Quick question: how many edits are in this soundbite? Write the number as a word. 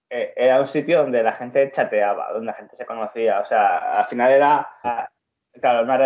one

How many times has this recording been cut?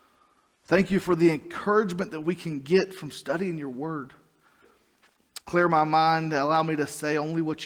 one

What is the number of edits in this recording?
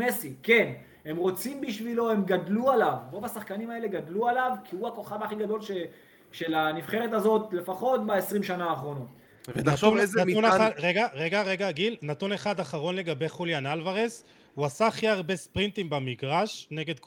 zero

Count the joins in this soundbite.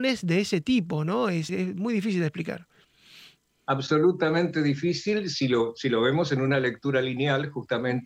one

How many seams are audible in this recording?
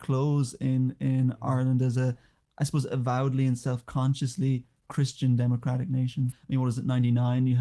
one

